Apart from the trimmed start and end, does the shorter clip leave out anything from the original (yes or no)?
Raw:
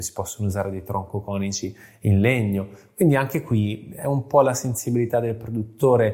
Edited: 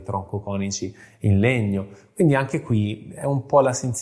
no